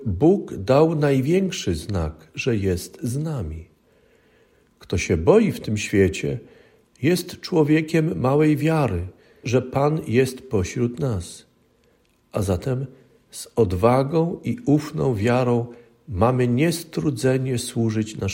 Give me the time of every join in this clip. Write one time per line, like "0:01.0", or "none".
0:09.4